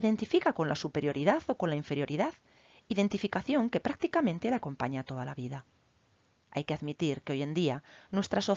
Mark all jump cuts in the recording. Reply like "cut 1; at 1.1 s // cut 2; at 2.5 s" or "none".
cut 1; at 6.3 s